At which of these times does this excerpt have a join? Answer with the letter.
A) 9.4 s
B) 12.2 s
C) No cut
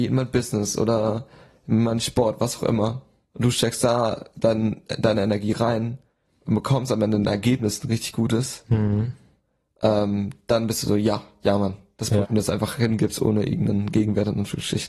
B